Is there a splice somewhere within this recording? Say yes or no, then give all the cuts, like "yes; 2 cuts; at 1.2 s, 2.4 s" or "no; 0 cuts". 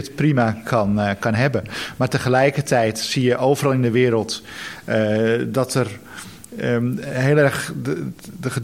no; 0 cuts